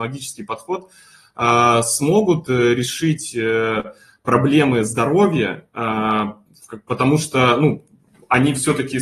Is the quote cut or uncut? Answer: uncut